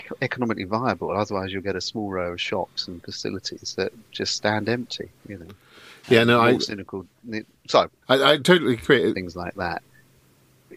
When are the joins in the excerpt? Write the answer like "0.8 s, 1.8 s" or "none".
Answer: 8.0 s, 9.1 s